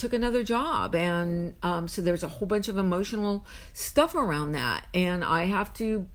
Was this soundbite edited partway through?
no; 0 cuts

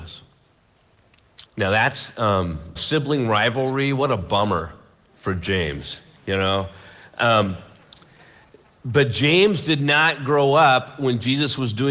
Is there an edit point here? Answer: yes; 2 cuts; at 1.4 s, 2.8 s

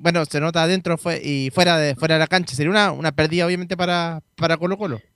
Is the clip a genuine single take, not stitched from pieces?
yes; 0 cuts

